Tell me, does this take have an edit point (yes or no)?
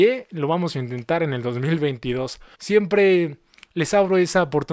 yes